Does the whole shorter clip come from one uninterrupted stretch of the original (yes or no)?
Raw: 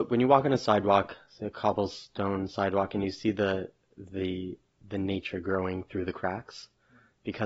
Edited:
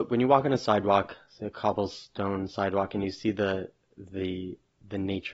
yes